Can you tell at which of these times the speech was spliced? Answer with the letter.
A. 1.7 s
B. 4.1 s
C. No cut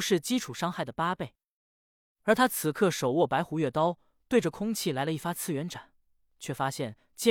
C